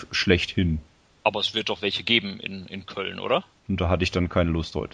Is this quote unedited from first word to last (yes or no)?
no